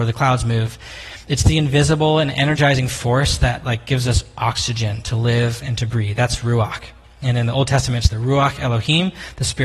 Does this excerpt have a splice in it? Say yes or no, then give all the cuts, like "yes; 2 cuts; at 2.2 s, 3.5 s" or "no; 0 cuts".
no; 0 cuts